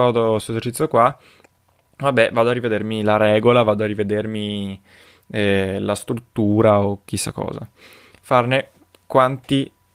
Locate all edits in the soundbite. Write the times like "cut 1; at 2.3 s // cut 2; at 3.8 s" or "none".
cut 1; at 8.2 s